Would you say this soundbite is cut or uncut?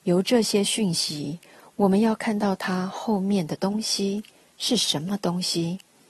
uncut